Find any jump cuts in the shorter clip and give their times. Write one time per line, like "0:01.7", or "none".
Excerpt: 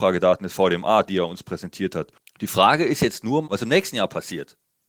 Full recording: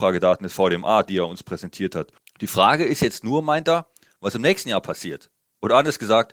0:03.4